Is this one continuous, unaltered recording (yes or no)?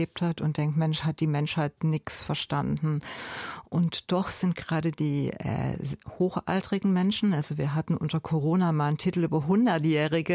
yes